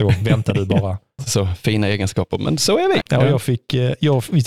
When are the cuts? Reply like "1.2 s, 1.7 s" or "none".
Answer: 1.2 s, 3.0 s